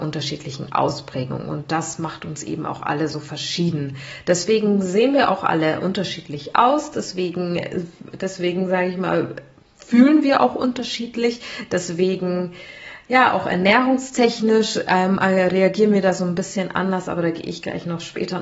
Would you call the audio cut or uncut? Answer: uncut